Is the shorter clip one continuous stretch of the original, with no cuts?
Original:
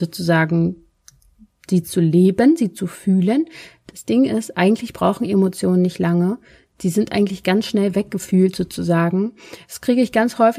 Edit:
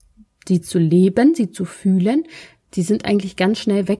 no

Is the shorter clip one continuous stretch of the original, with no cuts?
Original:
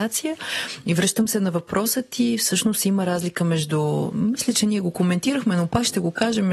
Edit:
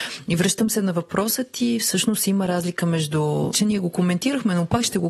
no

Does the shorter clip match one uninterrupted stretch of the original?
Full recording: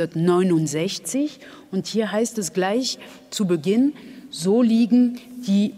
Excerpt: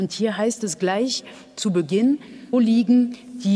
no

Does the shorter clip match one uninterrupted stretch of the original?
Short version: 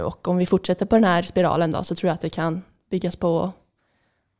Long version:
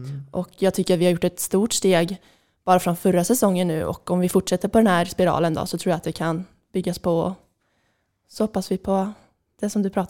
yes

